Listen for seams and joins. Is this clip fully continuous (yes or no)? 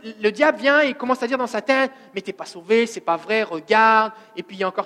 yes